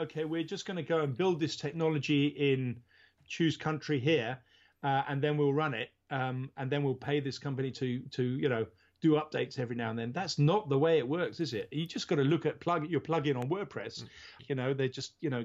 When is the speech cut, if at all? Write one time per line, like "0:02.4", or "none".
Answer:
0:14.4